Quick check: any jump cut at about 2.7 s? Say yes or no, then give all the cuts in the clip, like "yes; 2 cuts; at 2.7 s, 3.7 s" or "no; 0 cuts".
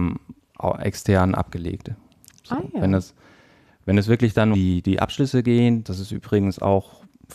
no; 2 cuts; at 4.5 s, 5.8 s